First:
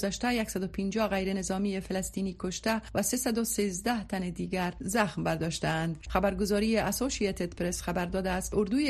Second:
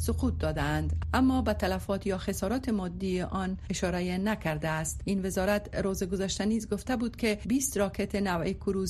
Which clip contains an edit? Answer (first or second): first